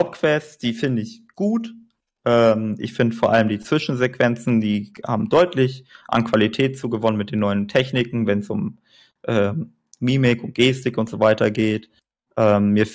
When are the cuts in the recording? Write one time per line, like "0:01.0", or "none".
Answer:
none